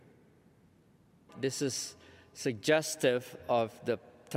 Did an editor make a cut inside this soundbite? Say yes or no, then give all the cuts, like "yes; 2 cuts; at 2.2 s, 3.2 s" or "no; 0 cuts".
yes; 1 cut; at 1.3 s